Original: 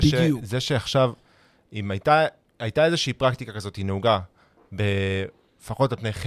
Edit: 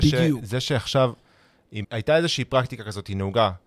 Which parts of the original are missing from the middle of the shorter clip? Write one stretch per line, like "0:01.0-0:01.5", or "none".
0:01.8-0:02.5